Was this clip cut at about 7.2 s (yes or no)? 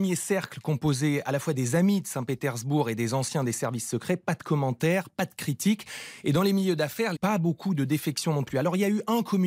yes